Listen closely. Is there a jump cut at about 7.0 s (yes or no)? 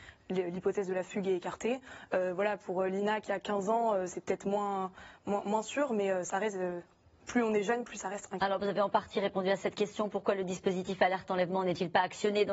no